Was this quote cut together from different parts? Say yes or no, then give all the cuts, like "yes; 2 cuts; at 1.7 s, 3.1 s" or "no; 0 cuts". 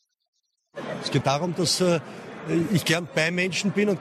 yes; 1 cut; at 1.2 s